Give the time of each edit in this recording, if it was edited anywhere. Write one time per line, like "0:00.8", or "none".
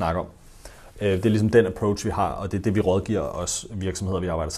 none